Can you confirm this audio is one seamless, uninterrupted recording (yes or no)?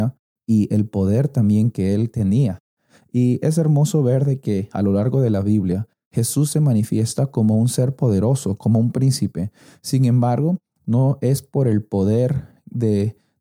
yes